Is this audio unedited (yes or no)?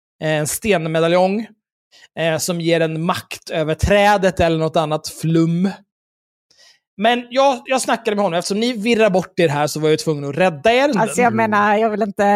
no